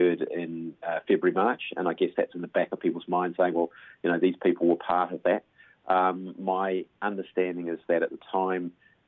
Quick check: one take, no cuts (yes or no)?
yes